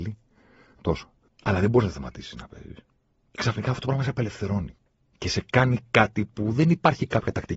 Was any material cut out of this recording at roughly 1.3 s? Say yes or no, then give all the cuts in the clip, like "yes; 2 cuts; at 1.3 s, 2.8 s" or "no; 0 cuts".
yes; 1 cut; at 1.3 s